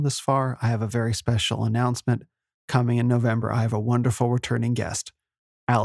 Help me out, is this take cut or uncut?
uncut